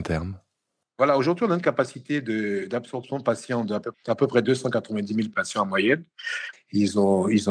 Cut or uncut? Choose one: cut